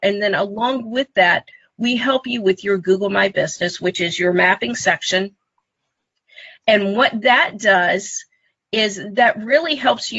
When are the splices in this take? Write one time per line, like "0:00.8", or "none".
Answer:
none

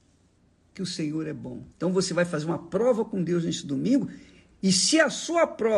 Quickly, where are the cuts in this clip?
0:01.7

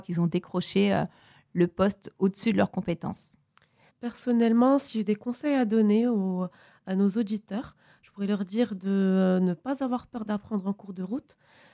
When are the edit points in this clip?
0:03.9

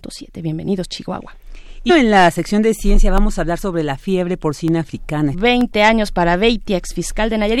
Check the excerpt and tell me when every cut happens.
0:01.9
0:05.3

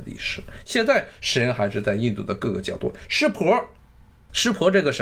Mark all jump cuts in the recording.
none

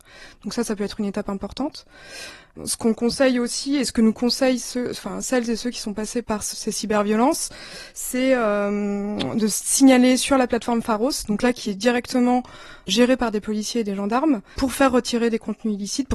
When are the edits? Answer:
0:14.6

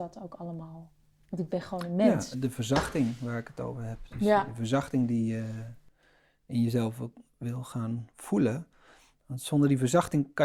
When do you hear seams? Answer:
0:02.3

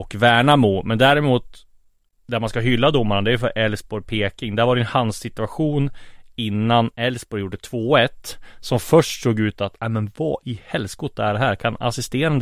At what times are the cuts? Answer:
none

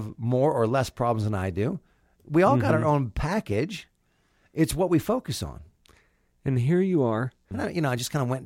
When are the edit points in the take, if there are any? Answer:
0:07.5

